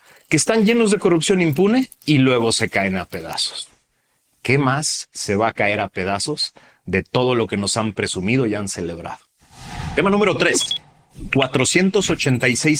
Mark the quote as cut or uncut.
cut